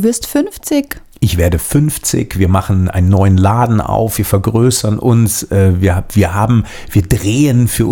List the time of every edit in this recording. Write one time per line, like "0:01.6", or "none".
none